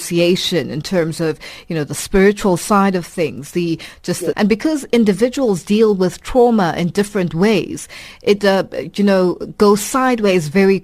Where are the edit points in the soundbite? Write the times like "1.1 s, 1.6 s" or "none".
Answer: 4.3 s, 8.4 s